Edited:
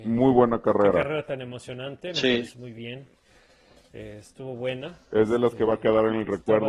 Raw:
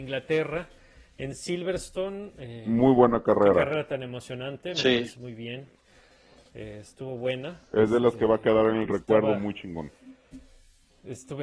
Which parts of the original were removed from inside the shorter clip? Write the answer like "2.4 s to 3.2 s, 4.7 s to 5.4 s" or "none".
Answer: none